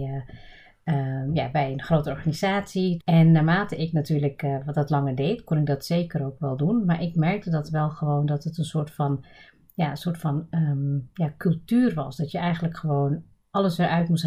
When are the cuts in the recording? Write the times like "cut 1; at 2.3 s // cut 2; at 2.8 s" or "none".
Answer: cut 1; at 3.0 s